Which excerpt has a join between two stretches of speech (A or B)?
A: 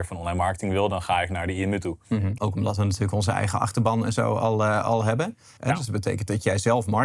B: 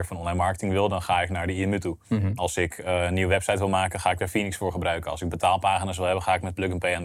A